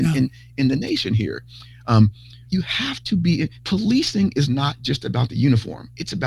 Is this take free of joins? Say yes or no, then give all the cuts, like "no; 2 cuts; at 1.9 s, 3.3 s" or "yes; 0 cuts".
no; 2 cuts; at 2.5 s, 3.6 s